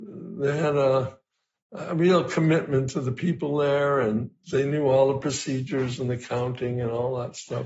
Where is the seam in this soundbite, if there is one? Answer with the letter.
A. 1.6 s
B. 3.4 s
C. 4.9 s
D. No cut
D